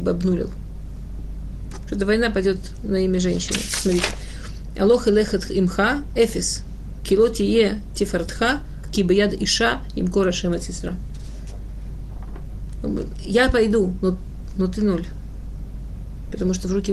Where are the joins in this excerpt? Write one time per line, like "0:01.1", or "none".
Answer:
0:08.8